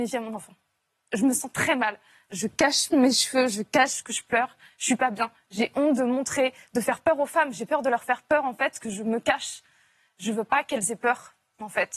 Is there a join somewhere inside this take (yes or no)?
no